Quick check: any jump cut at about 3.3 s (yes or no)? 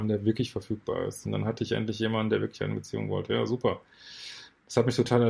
no